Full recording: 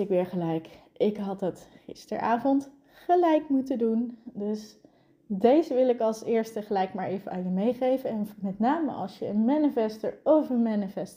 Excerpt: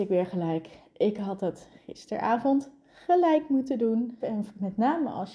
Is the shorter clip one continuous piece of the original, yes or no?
no